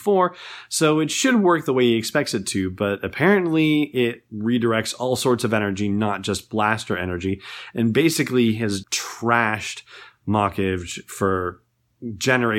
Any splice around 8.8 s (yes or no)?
yes